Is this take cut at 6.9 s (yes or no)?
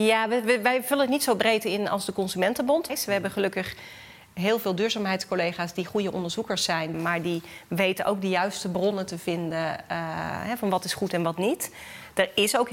yes